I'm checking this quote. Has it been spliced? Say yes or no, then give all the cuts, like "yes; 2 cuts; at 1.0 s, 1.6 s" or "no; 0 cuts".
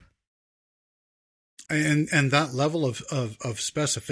yes; 1 cut; at 1.7 s